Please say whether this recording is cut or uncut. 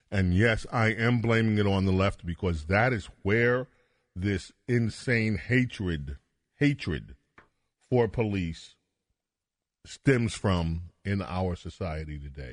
uncut